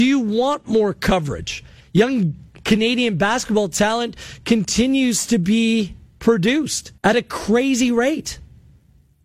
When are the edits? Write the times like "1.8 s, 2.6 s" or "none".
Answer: 1.8 s, 7.0 s